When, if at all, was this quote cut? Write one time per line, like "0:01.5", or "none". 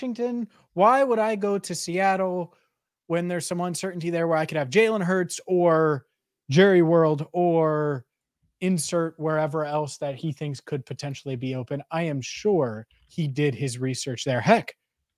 none